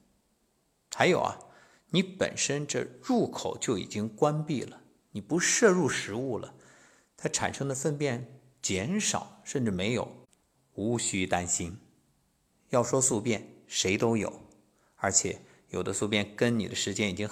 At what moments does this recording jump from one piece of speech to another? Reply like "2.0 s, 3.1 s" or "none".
10.5 s, 12.5 s